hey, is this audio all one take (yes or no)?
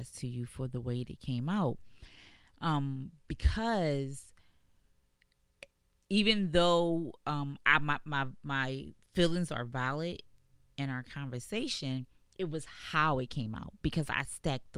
yes